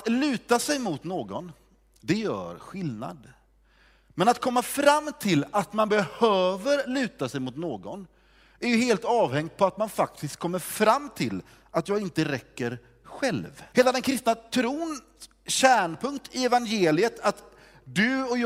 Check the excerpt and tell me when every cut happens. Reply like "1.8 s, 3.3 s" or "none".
13.7 s